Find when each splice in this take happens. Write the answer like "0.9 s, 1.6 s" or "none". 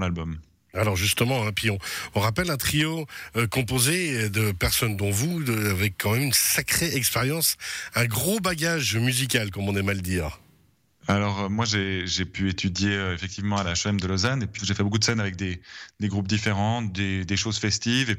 14.6 s